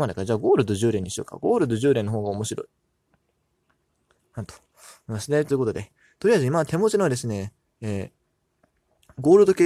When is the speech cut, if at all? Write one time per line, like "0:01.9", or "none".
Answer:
0:05.5